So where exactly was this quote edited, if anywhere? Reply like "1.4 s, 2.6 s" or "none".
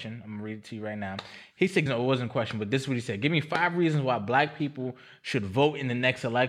1.9 s